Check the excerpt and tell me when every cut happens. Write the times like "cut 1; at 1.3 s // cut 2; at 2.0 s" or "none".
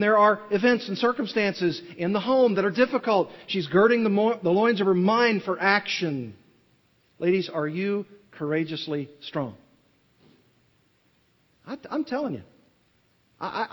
none